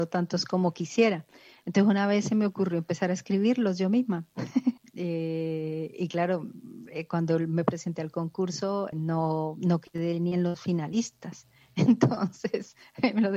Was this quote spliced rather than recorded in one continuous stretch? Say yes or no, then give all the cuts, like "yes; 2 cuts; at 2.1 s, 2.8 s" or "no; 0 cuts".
yes; 2 cuts; at 4.8 s, 8.9 s